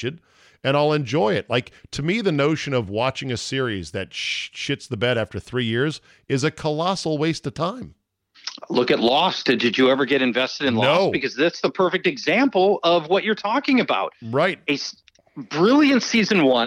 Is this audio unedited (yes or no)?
yes